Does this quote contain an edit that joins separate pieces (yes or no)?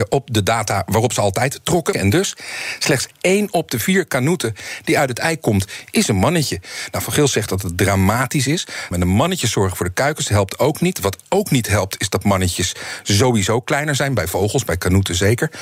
yes